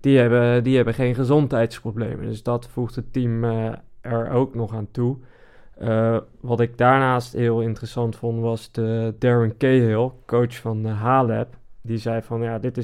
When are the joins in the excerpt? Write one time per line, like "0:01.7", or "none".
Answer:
0:09.2